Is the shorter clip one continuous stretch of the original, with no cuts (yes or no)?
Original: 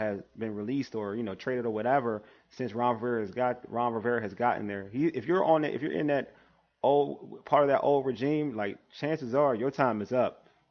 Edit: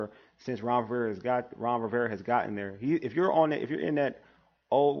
yes